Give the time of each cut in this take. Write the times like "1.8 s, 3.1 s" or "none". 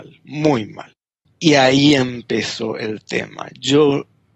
1.3 s